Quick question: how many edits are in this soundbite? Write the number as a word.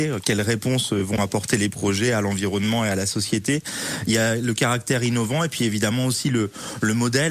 zero